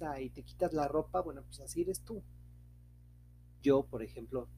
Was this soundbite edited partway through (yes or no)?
yes